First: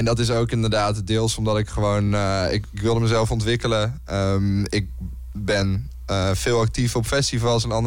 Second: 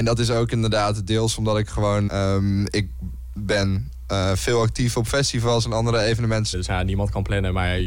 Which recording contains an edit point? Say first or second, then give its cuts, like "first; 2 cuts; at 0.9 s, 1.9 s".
second; 2 cuts; at 2.1 s, 6.5 s